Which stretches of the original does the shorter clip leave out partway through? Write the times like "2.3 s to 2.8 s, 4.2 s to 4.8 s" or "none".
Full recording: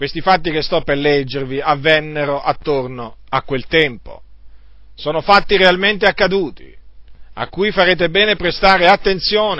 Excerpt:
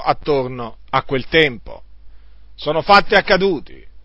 5.5 s to 6.0 s